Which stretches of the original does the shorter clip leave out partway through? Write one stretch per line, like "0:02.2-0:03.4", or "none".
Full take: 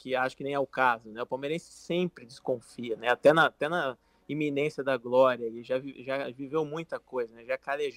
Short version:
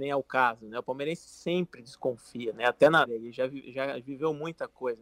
0:03.5-0:05.4